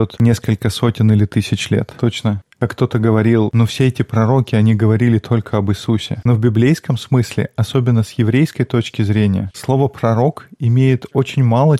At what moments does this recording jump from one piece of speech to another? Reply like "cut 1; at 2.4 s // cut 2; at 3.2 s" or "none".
none